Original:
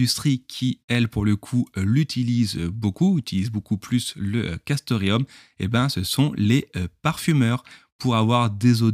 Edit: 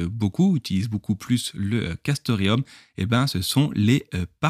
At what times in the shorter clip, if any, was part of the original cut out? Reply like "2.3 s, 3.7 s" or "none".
none